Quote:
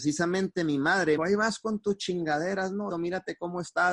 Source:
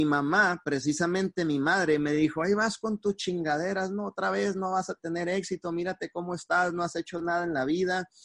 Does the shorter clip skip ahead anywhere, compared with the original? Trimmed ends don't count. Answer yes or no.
yes